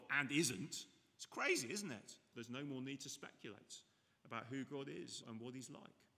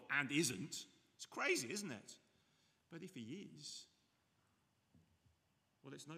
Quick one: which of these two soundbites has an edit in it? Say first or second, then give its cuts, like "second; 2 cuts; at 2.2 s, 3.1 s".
first; 2 cuts; at 2.3 s, 5.2 s